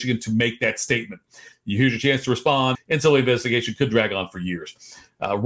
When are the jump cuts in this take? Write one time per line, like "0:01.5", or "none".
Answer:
0:01.5
0:02.7

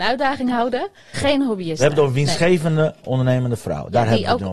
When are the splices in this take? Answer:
0:01.1

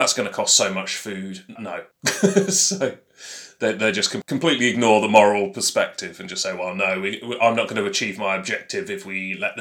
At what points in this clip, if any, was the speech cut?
0:01.6

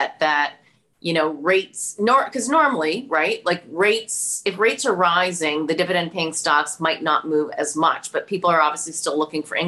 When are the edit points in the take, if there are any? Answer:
none

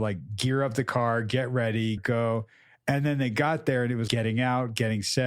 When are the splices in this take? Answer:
0:02.0
0:04.1

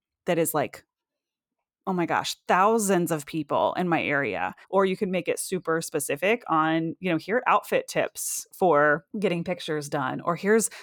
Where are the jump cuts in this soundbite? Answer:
0:04.6
0:09.1

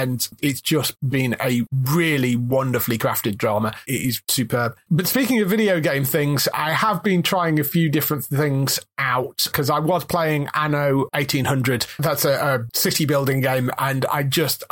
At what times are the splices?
0:03.8
0:06.5

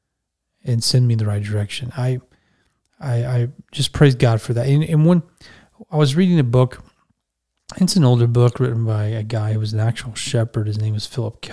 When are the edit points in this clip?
none

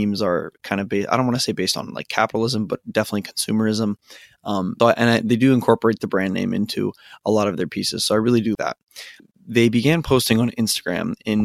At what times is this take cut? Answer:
0:04.8
0:08.5

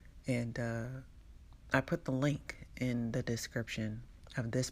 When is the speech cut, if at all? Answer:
none

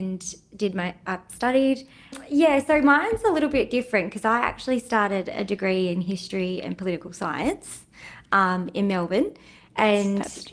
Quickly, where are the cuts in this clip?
0:02.1

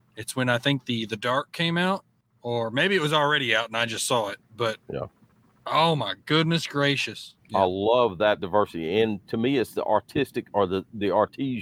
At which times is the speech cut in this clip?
0:07.4

